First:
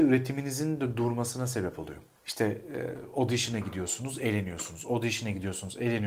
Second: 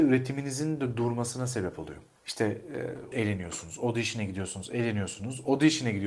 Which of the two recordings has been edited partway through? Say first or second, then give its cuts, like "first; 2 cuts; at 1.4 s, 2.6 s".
second; 1 cut; at 3.1 s